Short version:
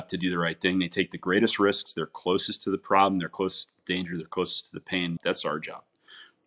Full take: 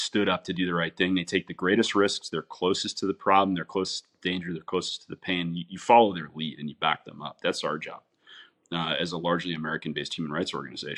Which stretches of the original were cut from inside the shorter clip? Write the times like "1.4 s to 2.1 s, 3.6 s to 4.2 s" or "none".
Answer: 5.5 s to 7.4 s

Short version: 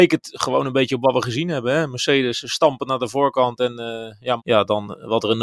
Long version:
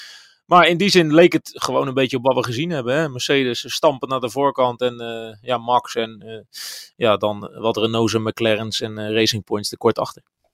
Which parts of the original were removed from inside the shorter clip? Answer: 5.6 s to 6.9 s

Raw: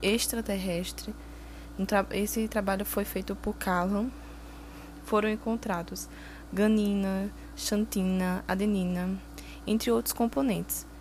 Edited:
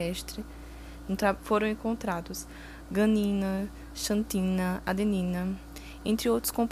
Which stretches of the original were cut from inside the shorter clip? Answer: 2.1 s to 5.0 s

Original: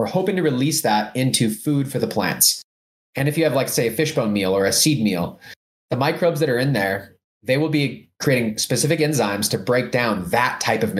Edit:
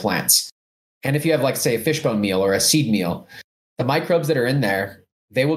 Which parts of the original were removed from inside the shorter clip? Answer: none

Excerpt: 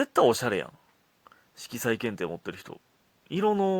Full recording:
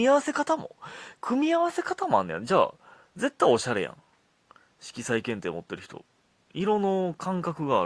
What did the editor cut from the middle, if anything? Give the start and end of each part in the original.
none

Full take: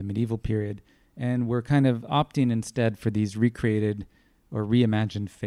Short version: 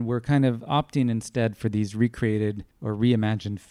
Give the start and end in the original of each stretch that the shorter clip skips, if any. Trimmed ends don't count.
4.1 s to 4.4 s

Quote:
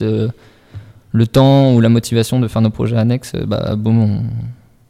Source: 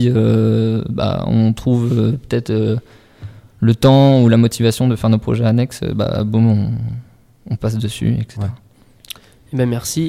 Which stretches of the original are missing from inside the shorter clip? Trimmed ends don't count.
none

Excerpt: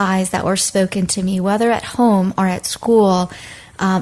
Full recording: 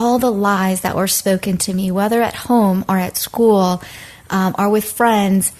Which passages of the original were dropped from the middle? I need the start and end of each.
none

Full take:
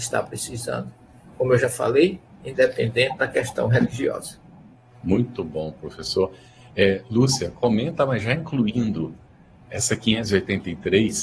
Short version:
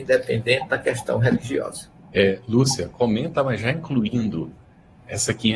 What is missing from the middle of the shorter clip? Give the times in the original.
4.6 s to 6.7 s

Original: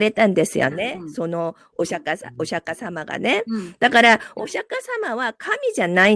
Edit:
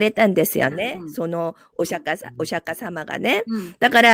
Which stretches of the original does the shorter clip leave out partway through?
none

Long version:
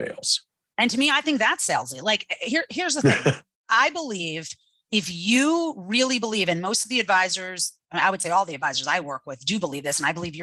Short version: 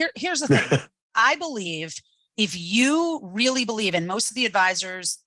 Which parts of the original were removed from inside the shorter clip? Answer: none

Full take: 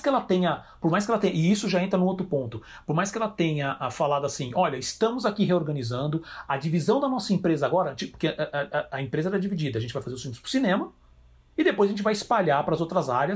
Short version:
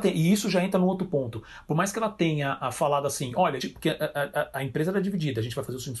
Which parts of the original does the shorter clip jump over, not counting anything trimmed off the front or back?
4.8 s to 8.0 s

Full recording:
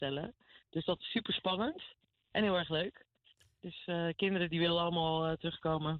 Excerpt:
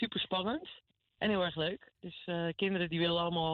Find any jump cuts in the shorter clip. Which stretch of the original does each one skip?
3.1 s to 3.5 s

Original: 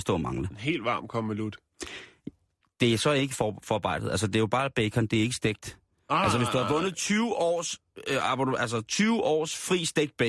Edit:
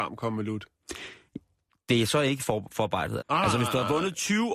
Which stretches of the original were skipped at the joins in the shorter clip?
4.1 s to 6.0 s

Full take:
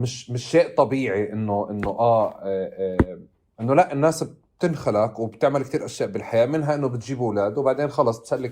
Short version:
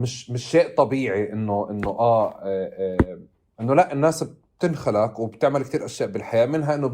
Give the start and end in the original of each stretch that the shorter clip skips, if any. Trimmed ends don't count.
none

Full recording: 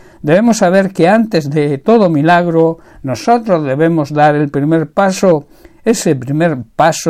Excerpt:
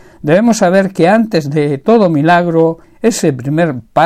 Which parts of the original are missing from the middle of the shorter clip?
2.8 s to 5.7 s

